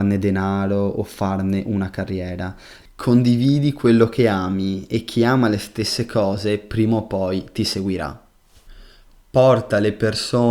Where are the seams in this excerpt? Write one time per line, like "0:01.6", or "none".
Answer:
0:02.8